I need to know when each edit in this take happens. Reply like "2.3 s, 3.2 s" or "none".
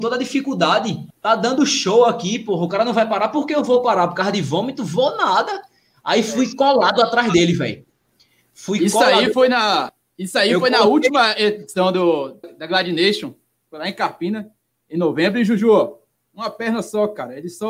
1.1 s, 12.4 s